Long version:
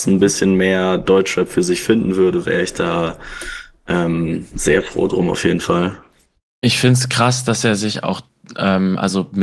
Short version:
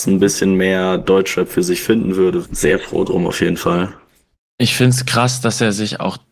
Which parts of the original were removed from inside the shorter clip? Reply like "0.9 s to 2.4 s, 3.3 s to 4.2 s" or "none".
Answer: 2.4 s to 4.5 s

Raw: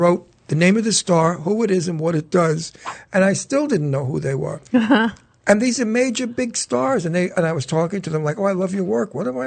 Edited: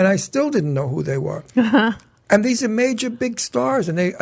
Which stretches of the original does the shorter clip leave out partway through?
none

